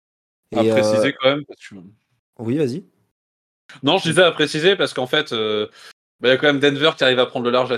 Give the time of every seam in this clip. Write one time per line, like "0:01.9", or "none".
none